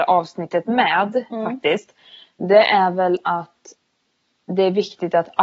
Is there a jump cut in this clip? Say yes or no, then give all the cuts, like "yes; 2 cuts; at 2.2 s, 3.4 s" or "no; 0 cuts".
no; 0 cuts